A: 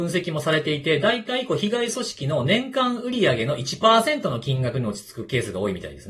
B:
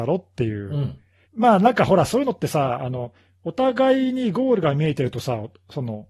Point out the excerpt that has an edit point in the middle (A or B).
B